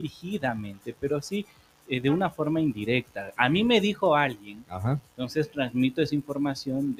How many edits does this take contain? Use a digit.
0